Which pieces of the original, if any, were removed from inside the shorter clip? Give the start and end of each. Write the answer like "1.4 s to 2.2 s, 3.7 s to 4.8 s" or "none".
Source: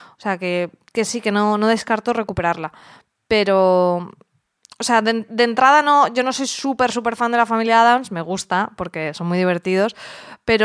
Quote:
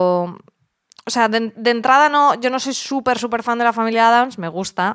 none